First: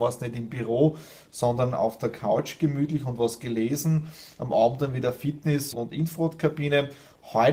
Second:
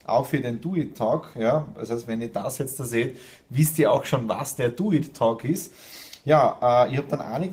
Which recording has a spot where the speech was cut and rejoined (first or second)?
first